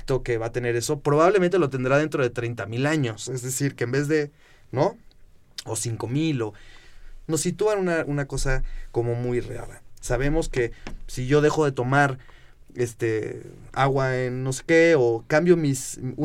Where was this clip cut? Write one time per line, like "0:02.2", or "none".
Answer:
0:10.0

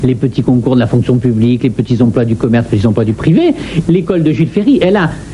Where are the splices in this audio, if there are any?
0:03.8

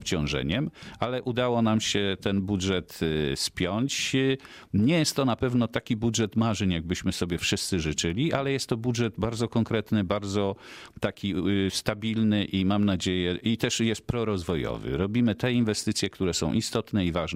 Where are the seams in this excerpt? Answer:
none

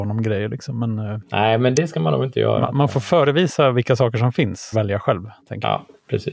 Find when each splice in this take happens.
0:04.7

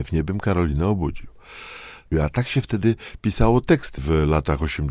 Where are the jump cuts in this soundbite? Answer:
0:02.1
0:04.0

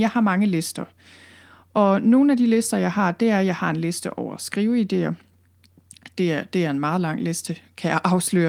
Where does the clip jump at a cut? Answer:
0:06.1

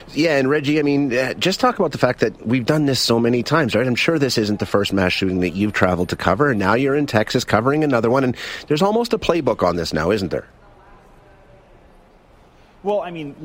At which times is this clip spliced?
none

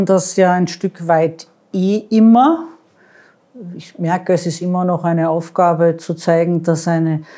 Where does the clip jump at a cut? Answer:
none

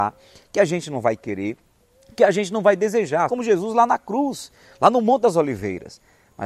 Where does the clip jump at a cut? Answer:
0:03.3

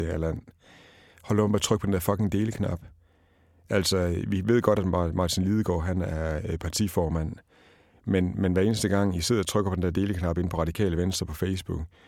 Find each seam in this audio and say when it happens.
none

